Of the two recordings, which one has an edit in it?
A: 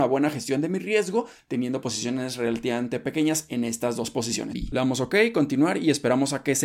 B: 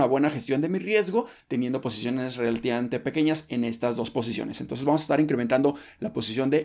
A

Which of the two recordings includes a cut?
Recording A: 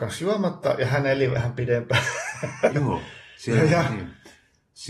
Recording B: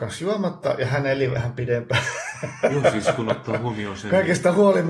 A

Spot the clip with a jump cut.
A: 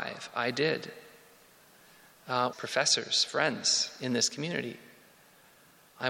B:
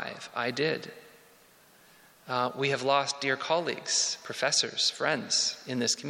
A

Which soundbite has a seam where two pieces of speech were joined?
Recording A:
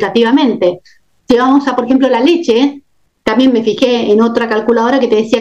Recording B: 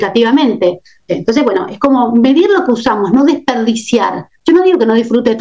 B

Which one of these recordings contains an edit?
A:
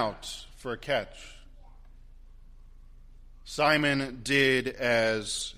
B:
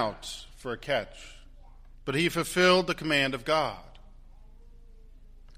B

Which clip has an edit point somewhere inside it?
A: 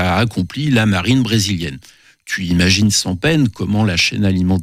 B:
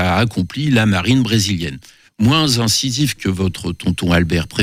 B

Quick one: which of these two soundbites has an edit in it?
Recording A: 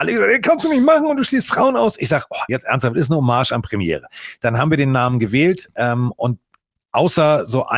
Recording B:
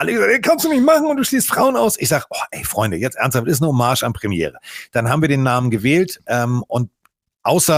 A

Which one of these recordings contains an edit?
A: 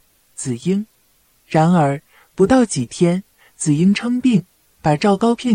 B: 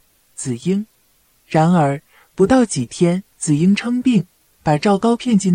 B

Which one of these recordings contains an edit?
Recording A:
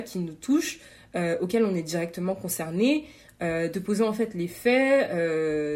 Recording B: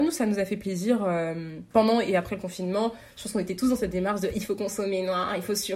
B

